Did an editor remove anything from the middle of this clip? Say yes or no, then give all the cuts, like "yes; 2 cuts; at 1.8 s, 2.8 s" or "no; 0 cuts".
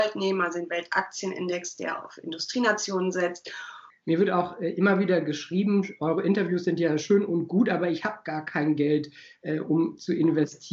yes; 1 cut; at 3.9 s